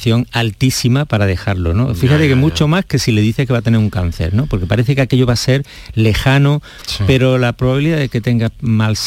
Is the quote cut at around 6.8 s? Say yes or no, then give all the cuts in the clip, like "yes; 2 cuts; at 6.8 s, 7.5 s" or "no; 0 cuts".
yes; 1 cut; at 6.8 s